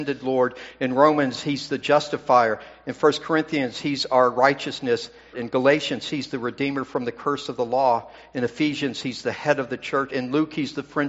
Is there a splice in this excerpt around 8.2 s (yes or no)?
no